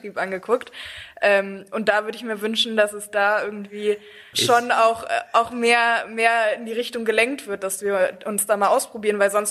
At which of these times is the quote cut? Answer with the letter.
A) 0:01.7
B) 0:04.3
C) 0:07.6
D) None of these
B